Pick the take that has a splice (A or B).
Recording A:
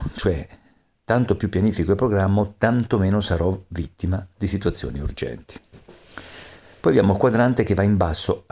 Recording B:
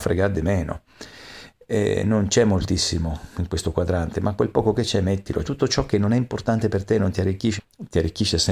B